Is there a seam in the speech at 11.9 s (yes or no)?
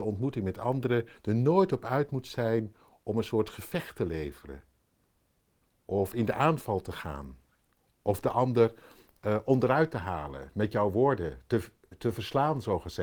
yes